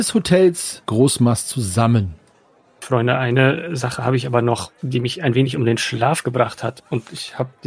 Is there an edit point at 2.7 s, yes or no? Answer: no